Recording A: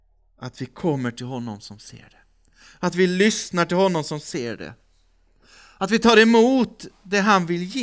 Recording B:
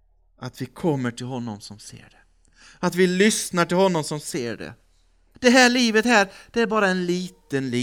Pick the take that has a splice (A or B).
B